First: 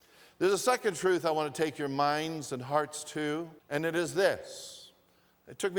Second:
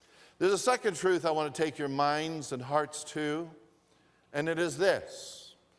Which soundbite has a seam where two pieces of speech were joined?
first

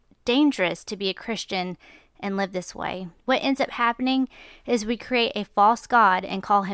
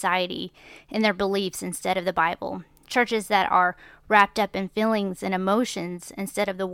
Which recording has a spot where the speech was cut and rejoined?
first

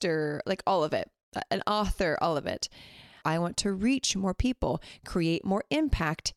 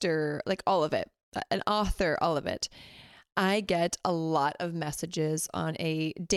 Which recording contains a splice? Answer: first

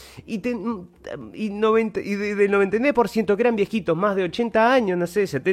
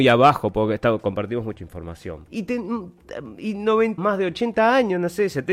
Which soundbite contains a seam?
second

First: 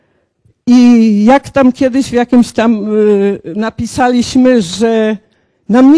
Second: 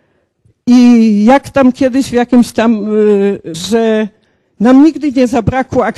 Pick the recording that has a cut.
second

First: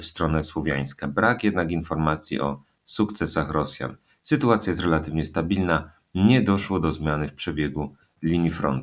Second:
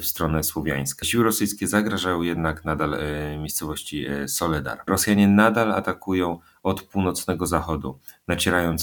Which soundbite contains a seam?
second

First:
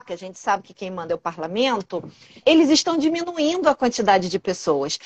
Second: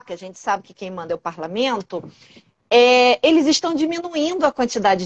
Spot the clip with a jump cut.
first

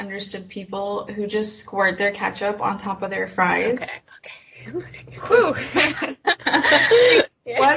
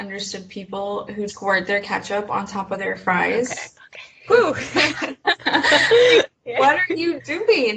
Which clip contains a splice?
second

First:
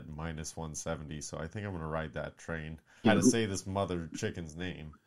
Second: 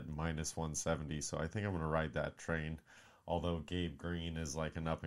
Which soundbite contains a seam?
first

